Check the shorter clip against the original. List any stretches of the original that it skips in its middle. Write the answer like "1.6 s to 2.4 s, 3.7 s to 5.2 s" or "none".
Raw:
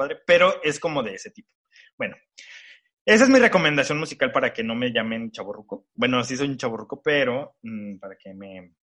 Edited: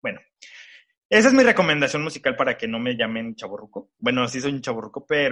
none